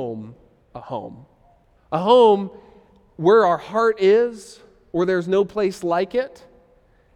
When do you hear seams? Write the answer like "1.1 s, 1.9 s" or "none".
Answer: 1.8 s

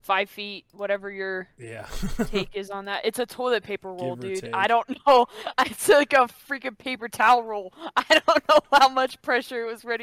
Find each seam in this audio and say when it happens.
none

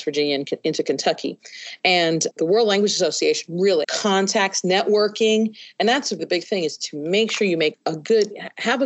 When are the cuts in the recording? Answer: 3.8 s, 6.2 s

